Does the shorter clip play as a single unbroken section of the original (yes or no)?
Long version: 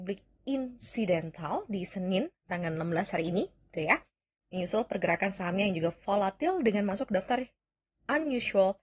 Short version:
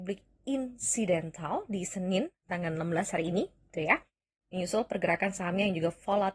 yes